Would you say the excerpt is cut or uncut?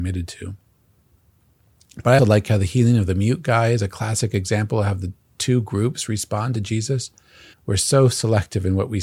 cut